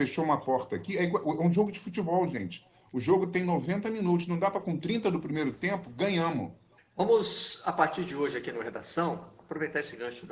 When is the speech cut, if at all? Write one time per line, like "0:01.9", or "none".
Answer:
0:06.8